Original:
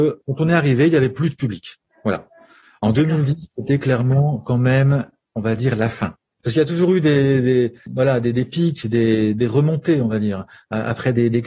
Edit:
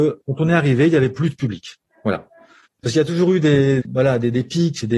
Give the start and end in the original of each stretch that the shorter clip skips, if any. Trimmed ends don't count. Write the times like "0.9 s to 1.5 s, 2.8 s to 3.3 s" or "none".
2.6 s to 6.3 s, 7.4 s to 7.8 s